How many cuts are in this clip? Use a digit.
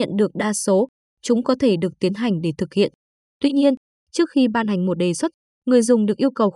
0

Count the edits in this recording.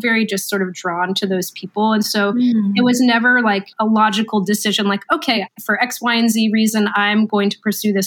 0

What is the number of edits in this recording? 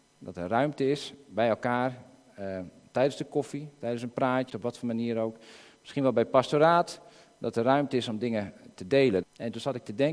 2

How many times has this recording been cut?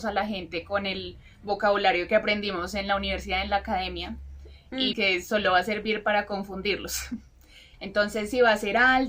2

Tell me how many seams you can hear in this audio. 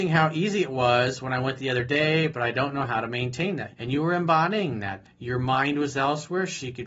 2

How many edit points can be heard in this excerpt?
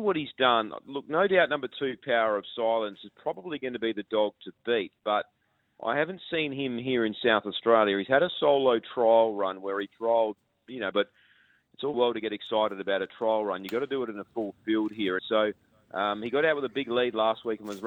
3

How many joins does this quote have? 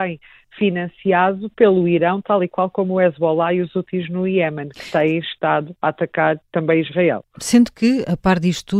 0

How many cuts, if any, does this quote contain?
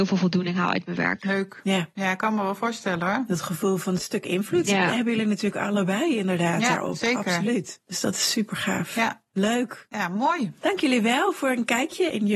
0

